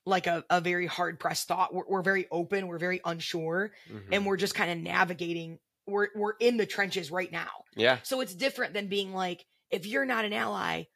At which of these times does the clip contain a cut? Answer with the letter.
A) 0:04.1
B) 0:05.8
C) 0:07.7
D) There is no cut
D